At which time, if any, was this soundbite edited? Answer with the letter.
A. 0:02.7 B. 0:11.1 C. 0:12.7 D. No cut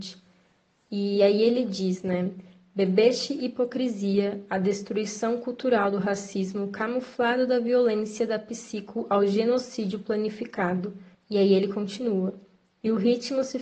B